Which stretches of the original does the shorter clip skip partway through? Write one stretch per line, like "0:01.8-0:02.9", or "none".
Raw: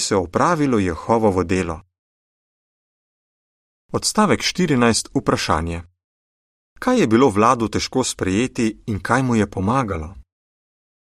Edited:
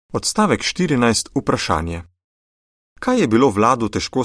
none